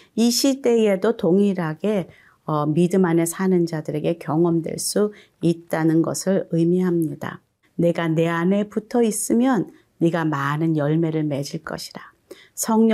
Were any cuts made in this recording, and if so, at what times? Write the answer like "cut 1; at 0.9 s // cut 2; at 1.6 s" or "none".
cut 1; at 7.6 s